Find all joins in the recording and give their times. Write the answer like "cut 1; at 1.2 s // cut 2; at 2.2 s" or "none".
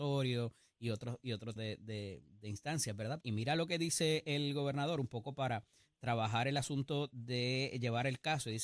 cut 1; at 1.6 s // cut 2; at 3.2 s